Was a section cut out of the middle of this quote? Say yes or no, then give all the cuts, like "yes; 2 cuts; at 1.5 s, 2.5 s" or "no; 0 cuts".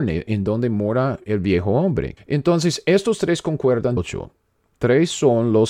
yes; 2 cuts; at 2.2 s, 4.0 s